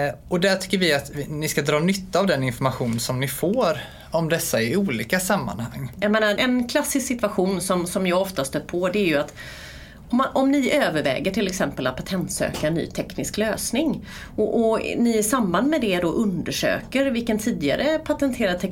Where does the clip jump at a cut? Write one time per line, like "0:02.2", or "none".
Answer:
0:06.4